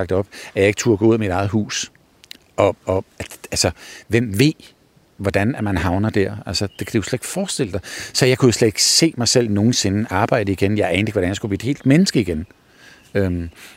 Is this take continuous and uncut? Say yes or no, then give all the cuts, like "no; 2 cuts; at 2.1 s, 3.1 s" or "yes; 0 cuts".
yes; 0 cuts